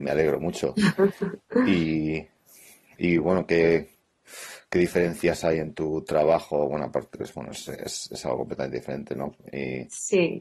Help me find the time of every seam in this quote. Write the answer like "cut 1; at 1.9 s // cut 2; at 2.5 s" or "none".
none